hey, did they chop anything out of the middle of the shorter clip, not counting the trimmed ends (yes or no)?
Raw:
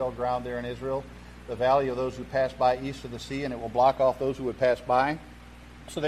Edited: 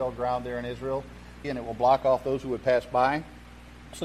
yes